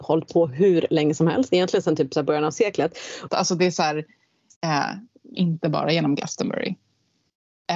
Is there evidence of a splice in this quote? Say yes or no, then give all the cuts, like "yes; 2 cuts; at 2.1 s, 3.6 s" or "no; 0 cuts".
yes; 2 cuts; at 3.3 s, 5.3 s